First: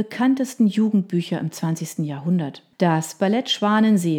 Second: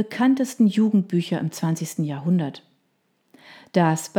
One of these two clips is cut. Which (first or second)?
first